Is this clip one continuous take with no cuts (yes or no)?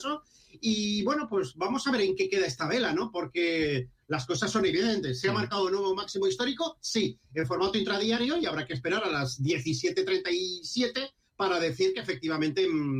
yes